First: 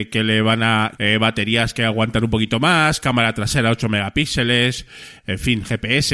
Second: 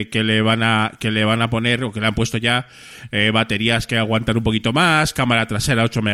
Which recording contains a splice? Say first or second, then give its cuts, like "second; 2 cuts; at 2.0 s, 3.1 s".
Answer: first; 1 cut; at 1.0 s